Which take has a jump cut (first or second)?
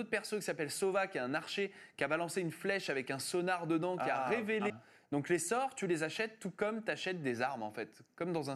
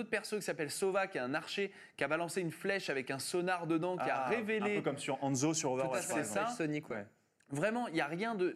first